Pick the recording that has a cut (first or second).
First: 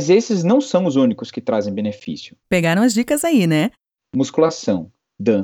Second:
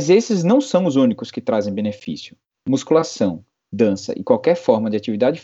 first